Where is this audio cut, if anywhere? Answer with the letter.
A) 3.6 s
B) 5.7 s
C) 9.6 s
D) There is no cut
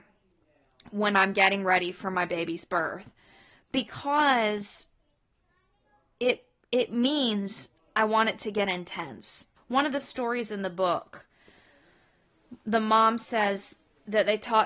C